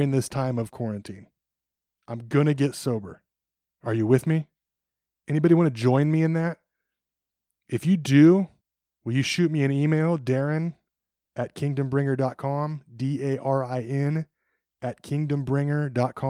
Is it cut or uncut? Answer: uncut